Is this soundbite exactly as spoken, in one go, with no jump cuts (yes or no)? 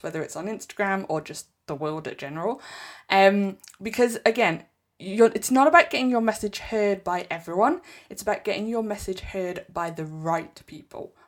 yes